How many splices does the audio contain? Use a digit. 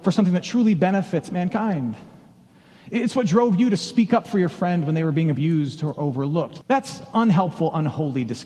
1